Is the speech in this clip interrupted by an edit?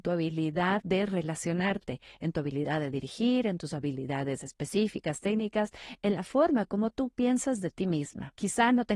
no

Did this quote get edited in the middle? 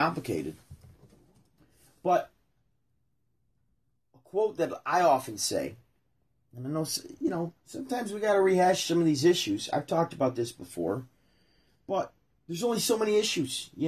no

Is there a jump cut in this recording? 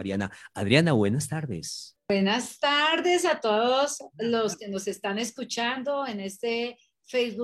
no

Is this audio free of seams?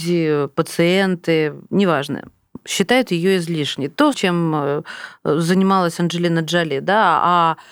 no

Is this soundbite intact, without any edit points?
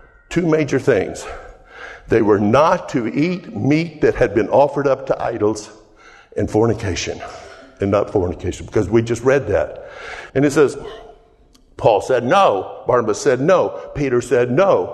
no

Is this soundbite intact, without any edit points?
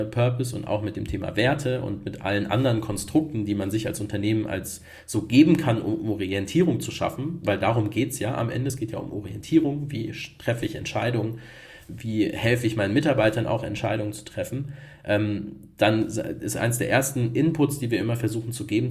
yes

